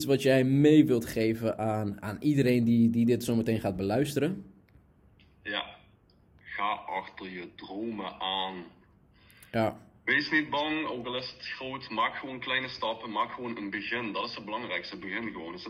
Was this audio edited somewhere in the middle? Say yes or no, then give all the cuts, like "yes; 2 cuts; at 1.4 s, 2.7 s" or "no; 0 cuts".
no; 0 cuts